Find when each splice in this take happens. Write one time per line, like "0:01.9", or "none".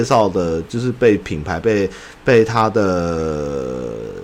none